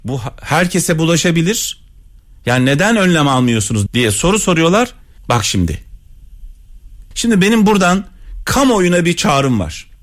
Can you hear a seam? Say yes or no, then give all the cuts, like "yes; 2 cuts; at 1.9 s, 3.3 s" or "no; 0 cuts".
yes; 3 cuts; at 3.9 s, 5.2 s, 7.1 s